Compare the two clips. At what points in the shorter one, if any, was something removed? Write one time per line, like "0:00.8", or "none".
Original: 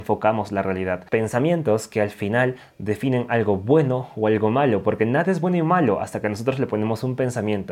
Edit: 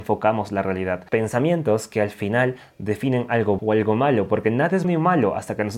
0:03.6
0:04.8